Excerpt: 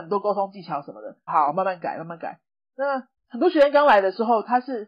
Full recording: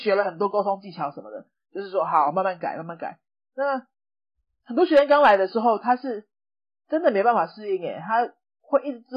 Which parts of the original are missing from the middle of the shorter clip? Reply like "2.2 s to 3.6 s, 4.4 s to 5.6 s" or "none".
1.6 s to 2.1 s, 4.0 s to 4.5 s